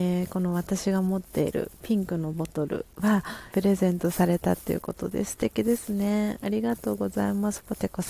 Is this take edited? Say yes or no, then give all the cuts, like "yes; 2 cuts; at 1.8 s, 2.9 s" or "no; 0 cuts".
yes; 1 cut; at 3.5 s